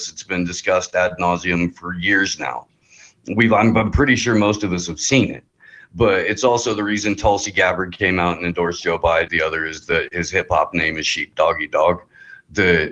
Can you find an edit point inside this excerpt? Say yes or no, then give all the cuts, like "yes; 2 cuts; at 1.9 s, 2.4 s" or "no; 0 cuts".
yes; 1 cut; at 9.3 s